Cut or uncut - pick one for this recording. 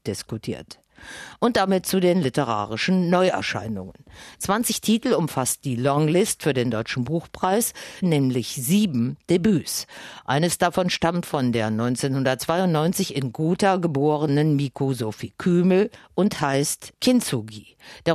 cut